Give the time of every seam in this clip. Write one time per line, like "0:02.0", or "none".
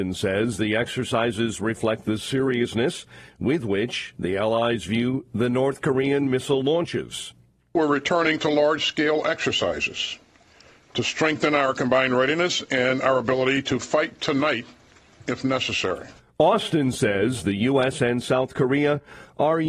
none